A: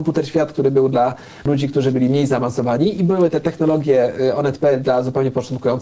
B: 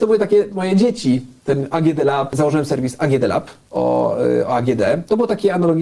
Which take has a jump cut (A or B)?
B